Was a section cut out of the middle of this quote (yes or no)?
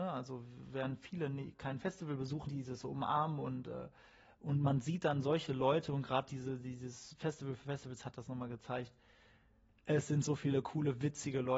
yes